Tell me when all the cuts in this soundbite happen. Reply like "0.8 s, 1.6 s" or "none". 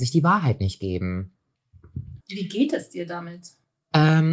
2.2 s

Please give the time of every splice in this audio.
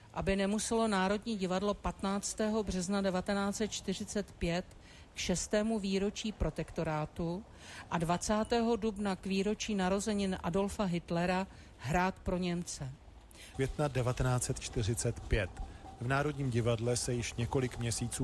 13.5 s

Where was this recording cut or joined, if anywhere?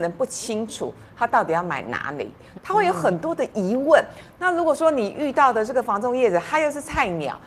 2.6 s

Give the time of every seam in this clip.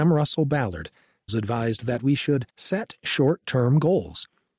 1.3 s, 2.5 s

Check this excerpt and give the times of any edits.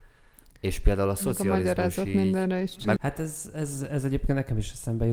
3.0 s

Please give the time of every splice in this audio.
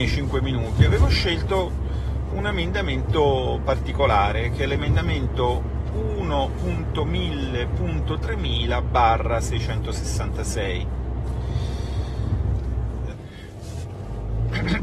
2.3 s, 13.1 s

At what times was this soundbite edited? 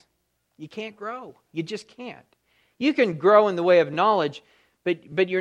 none

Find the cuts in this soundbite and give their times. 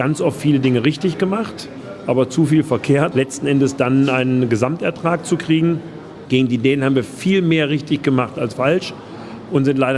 3.1 s

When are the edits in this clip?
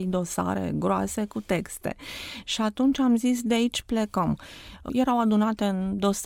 4.9 s

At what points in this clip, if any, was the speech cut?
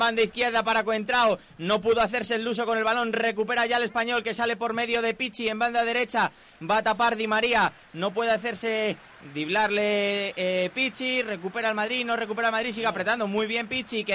none

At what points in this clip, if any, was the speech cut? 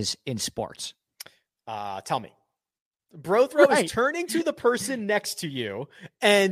3.1 s

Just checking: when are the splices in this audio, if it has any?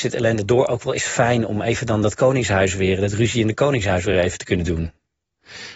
none

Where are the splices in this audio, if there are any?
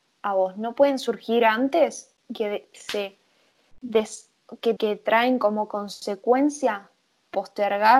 4.8 s

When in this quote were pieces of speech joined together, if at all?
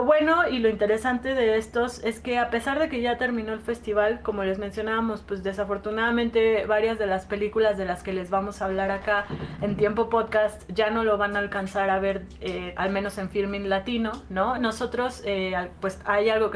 14.6 s

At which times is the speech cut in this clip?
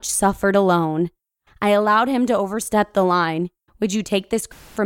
1.5 s, 3.7 s

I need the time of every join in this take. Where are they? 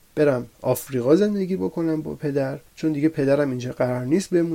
2.7 s

